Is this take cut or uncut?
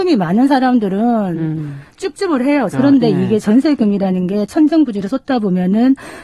cut